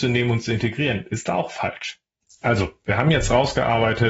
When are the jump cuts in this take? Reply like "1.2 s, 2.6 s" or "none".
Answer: none